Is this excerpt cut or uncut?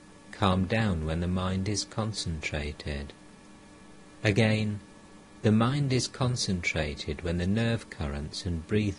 uncut